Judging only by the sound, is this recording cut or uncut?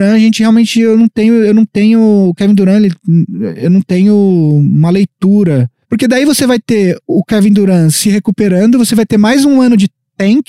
cut